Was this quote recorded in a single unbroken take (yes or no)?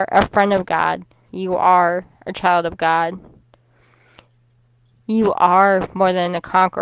no